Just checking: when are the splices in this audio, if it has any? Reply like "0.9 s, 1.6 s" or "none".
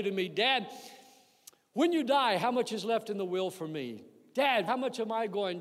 4.7 s